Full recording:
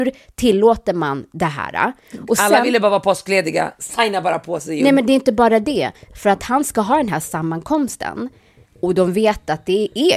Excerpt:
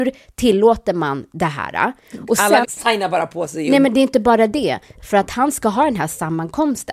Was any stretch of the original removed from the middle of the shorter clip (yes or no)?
yes